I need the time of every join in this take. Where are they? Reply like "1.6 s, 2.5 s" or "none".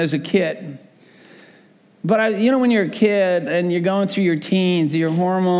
none